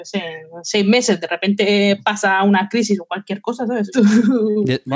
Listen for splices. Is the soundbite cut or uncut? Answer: cut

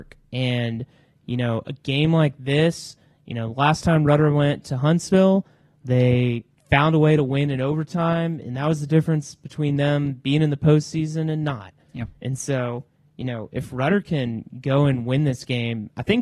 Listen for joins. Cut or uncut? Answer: uncut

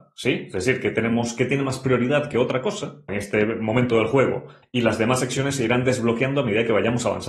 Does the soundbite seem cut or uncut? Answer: cut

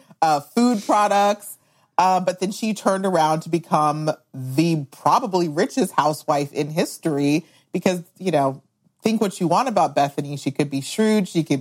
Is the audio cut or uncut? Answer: uncut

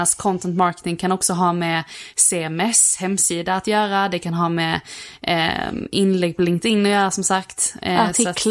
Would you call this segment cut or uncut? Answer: uncut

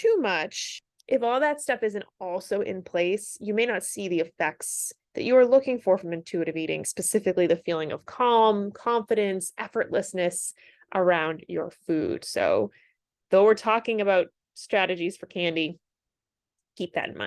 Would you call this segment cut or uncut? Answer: uncut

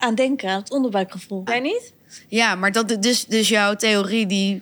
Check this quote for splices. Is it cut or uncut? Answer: cut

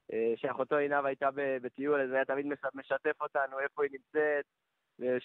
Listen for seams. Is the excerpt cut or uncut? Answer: uncut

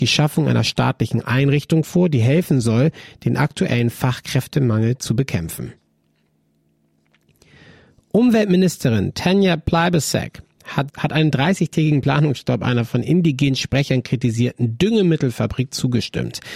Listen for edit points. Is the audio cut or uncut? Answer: cut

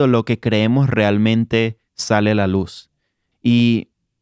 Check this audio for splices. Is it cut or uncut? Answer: cut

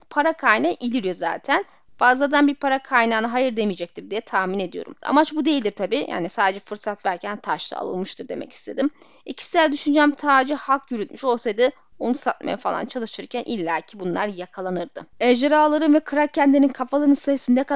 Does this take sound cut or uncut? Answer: cut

